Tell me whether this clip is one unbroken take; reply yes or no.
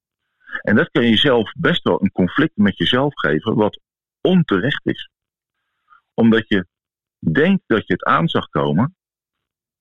yes